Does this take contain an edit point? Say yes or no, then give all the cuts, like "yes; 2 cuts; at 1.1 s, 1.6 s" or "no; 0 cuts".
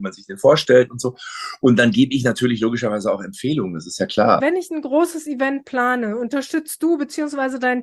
yes; 1 cut; at 4.4 s